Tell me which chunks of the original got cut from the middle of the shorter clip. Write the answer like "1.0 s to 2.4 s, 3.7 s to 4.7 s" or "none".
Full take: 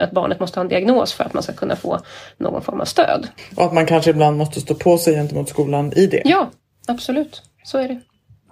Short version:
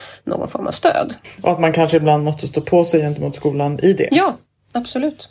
none